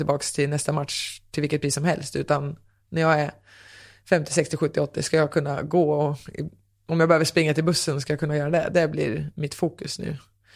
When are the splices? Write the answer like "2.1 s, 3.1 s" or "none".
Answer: 8.7 s